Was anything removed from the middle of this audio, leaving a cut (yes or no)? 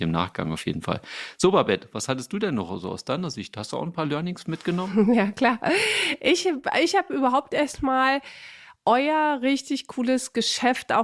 no